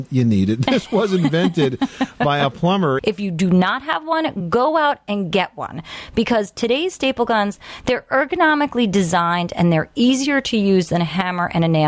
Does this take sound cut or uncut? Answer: cut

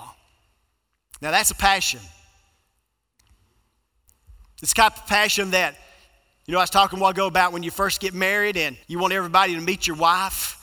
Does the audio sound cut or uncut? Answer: cut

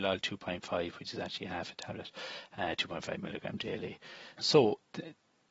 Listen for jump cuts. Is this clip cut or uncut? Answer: cut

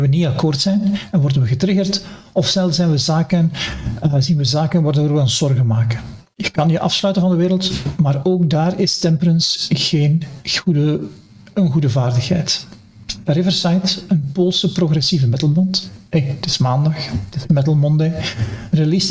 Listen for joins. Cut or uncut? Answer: uncut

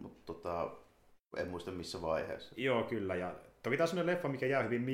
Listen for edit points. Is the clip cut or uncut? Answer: uncut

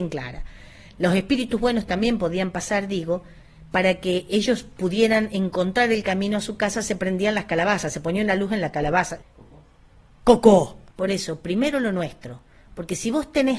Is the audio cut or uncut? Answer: cut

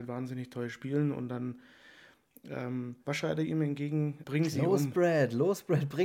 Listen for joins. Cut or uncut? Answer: cut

